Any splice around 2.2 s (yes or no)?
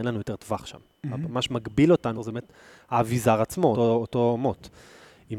yes